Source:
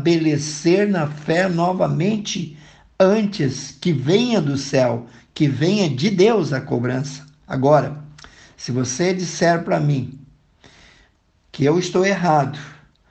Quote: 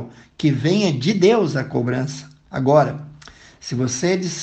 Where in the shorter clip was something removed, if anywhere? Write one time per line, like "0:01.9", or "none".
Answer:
none